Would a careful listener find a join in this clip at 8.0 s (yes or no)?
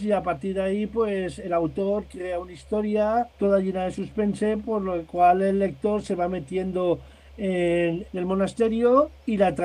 yes